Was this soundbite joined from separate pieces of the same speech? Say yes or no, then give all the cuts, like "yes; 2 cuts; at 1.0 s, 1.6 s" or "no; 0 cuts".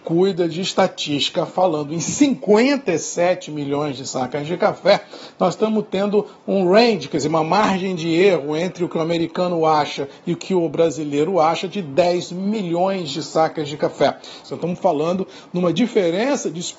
yes; 1 cut; at 14.4 s